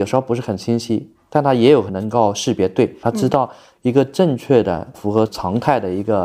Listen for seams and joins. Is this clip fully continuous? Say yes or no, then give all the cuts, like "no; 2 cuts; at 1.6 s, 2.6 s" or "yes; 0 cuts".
no; 3 cuts; at 1.9 s, 3.0 s, 4.9 s